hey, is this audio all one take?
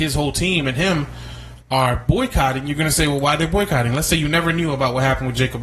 yes; 0 cuts

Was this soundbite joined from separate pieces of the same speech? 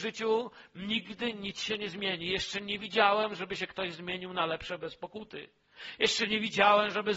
no; 0 cuts

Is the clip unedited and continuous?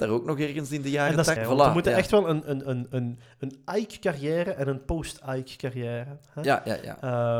no; 1 cut; at 1.4 s

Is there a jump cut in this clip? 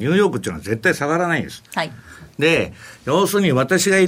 no; 0 cuts

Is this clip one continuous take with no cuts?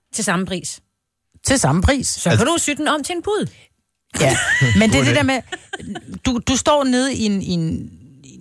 yes; 0 cuts

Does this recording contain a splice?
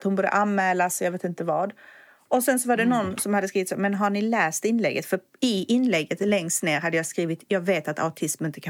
no; 0 cuts

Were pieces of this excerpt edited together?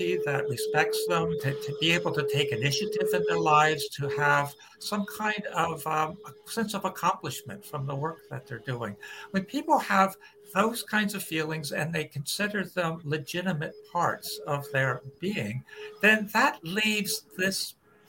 yes; 1 cut; at 1.4 s

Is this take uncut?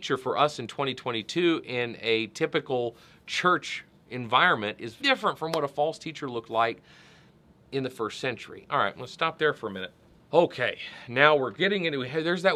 no; 3 cuts; at 5.0 s, 8.6 s, 10.2 s

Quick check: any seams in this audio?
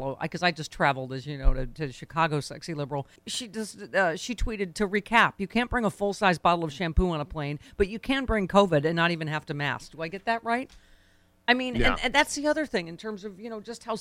yes; 1 cut; at 3.2 s

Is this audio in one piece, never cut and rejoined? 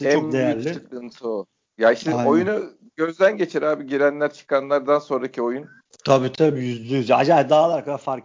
yes; 0 cuts

